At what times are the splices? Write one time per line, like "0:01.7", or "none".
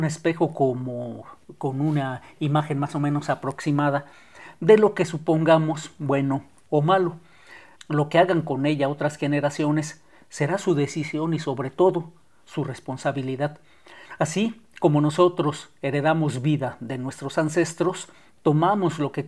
0:07.7